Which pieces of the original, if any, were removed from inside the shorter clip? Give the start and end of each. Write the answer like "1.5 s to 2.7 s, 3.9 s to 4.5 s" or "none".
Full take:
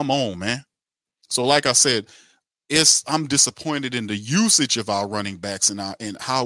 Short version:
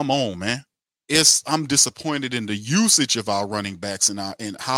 1.0 s to 2.6 s